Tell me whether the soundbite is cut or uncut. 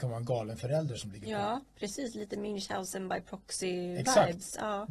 uncut